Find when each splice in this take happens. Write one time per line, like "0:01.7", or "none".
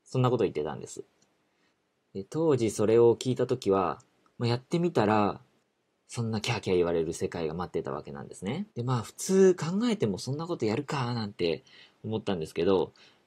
0:04.3
0:08.7